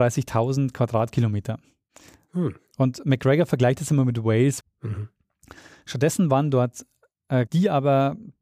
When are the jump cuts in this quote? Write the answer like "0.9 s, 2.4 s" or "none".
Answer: 4.6 s, 7.5 s